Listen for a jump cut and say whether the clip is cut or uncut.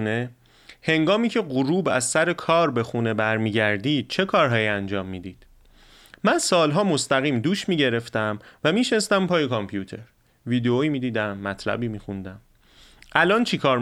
uncut